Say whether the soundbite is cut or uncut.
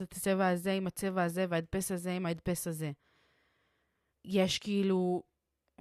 cut